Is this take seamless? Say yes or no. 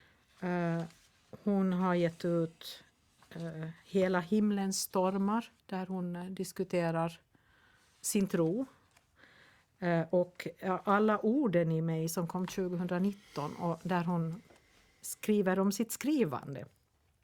no